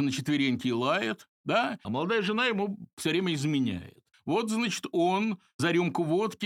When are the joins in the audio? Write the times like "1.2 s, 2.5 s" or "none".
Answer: 1.8 s, 4.1 s